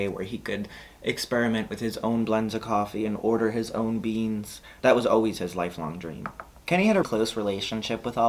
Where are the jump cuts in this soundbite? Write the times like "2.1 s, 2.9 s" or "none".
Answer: 7.0 s